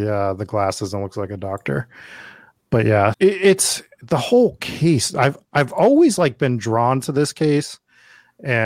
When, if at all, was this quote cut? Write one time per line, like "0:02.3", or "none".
0:03.1